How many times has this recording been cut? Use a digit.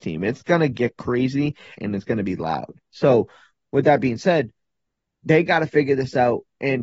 1